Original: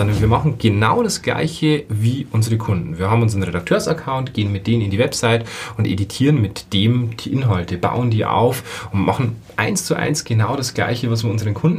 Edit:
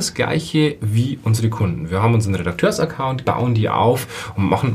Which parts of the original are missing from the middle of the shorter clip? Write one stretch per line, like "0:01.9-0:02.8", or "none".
0:04.3-0:07.8